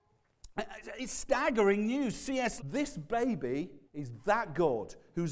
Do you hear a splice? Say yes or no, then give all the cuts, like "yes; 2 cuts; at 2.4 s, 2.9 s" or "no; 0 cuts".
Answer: yes; 2 cuts; at 2.6 s, 3.9 s